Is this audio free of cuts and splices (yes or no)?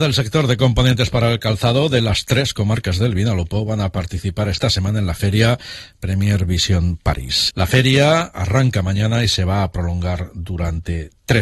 no